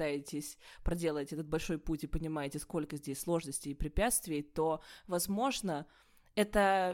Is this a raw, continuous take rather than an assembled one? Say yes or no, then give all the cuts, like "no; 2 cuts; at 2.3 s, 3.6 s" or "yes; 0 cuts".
yes; 0 cuts